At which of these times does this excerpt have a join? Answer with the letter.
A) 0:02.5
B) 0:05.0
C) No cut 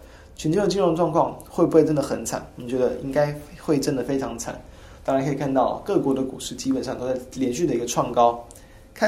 B